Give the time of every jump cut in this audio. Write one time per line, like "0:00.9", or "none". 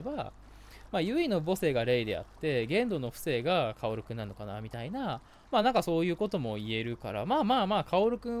none